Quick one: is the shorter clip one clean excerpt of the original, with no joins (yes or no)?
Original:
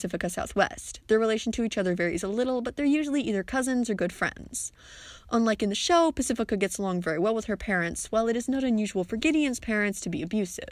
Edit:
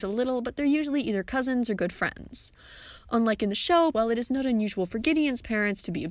no